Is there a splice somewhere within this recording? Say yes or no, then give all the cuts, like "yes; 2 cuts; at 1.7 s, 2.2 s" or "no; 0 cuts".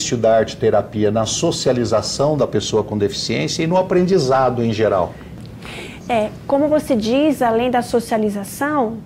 no; 0 cuts